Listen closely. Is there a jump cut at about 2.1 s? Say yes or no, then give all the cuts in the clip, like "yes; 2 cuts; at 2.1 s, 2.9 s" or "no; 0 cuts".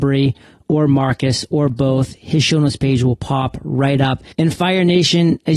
no; 1 cut; at 4.3 s